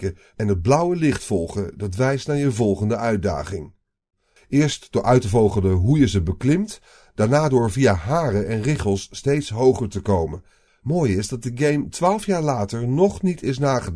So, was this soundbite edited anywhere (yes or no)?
yes